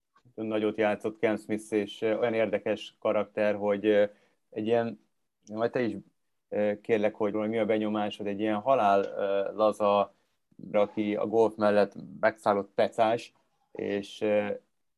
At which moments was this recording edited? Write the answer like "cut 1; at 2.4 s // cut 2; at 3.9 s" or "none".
cut 1; at 7.3 s // cut 2; at 10.7 s